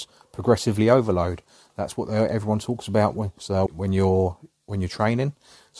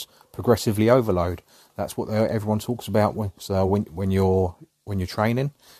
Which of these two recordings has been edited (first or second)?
first